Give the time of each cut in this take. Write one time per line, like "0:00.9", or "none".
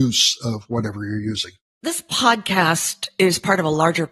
none